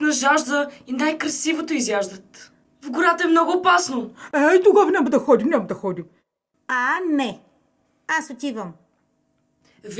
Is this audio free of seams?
no; 1 cut; at 2.6 s

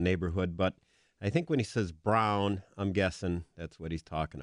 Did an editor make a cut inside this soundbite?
no; 0 cuts

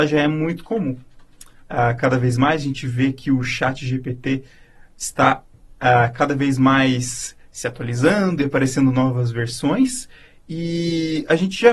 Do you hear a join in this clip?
yes; 1 cut; at 1.6 s

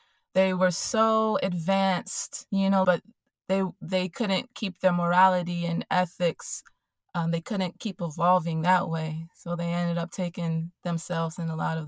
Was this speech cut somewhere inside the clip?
yes; 1 cut; at 2.8 s

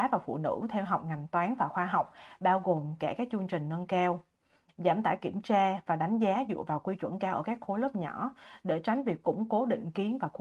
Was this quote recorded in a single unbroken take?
yes; 0 cuts

